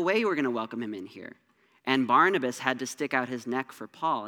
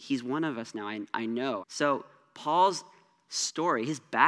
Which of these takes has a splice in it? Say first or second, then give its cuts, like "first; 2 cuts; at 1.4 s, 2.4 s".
second; 1 cut; at 1.6 s